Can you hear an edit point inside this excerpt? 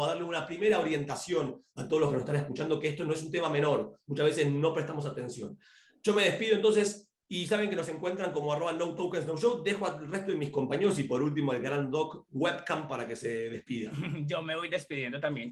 no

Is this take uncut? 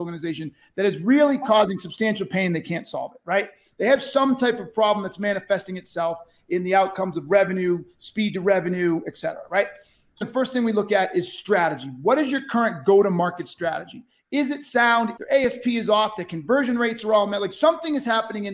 no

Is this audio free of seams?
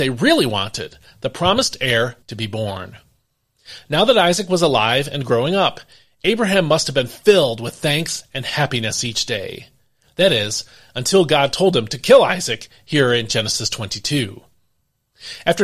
no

